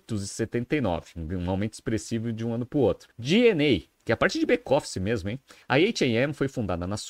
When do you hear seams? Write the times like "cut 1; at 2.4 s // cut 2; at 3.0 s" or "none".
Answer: cut 1; at 3.1 s // cut 2; at 5.6 s